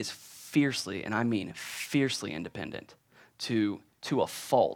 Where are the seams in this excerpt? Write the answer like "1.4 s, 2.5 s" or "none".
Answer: none